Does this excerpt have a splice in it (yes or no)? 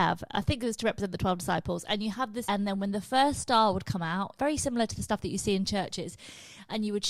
yes